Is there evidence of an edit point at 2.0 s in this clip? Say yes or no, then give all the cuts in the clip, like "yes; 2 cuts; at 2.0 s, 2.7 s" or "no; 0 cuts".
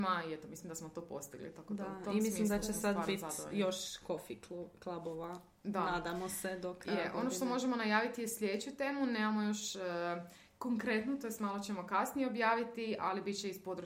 no; 0 cuts